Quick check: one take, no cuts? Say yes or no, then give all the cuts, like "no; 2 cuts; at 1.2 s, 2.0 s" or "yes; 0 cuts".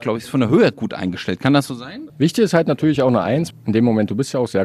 no; 2 cuts; at 2.1 s, 3.5 s